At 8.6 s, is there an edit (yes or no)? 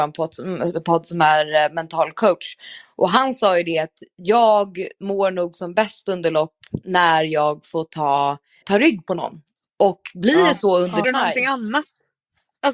yes